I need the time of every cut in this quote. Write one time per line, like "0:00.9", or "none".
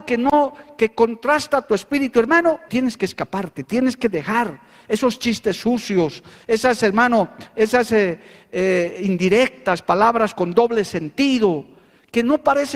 0:02.7